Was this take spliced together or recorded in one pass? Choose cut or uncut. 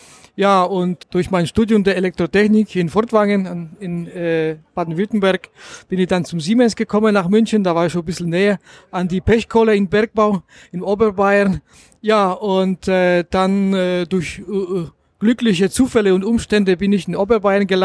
cut